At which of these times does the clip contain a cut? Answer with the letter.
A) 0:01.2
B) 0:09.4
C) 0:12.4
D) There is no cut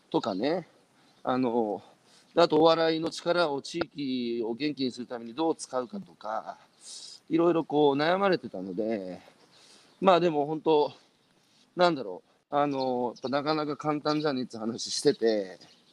C